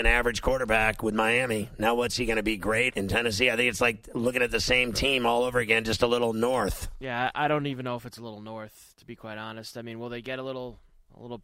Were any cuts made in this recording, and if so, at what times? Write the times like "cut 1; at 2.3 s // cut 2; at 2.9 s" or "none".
cut 1; at 2.9 s